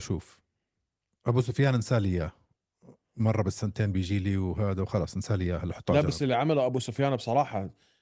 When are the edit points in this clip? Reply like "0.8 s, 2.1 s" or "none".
none